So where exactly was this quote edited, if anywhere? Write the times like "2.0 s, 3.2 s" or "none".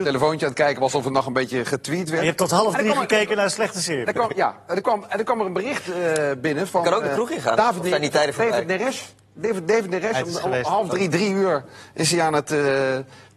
none